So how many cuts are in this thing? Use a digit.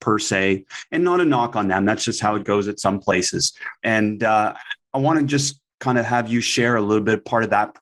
1